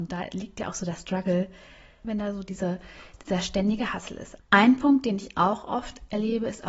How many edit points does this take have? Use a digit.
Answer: 2